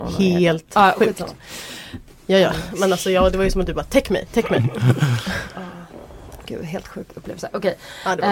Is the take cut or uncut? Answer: uncut